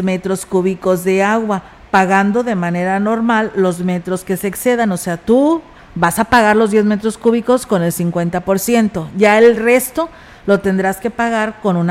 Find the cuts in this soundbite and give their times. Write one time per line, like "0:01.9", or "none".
0:05.8